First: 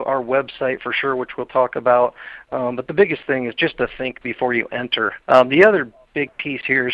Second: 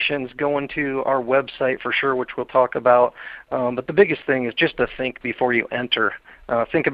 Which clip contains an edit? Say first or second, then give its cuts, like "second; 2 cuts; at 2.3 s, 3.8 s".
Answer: first; 1 cut; at 5.2 s